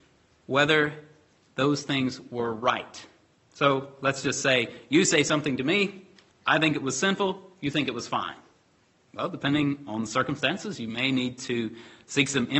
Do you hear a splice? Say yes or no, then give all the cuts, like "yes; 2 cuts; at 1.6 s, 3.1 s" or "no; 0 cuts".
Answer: yes; 1 cut; at 8.9 s